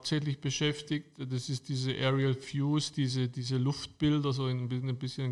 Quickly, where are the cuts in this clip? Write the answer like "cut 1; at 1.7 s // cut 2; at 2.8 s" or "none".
none